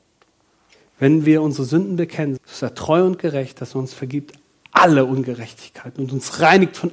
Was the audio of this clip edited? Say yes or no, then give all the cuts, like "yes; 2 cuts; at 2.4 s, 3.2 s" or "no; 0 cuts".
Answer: yes; 1 cut; at 2.4 s